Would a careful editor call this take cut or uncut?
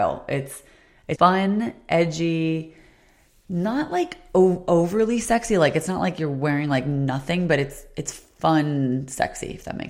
cut